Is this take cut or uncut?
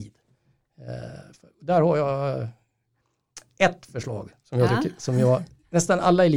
uncut